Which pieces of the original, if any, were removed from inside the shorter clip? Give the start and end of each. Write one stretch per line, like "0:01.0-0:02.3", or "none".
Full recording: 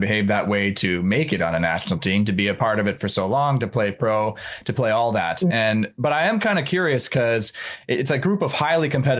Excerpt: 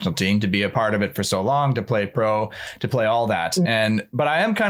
none